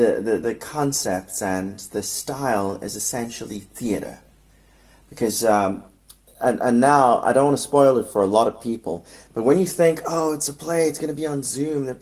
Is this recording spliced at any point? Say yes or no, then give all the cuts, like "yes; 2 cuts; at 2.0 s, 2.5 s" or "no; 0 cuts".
no; 0 cuts